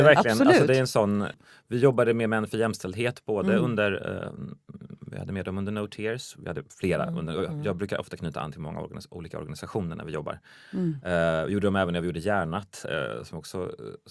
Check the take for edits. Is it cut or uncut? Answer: uncut